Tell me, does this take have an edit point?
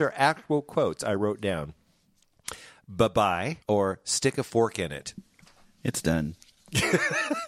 yes; 1 cut; at 3.6 s

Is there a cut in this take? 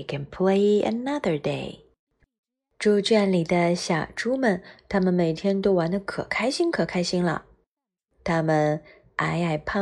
no; 0 cuts

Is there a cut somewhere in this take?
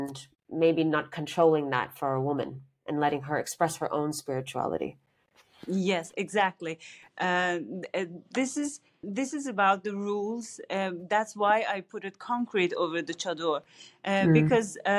yes; 1 cut; at 9.0 s

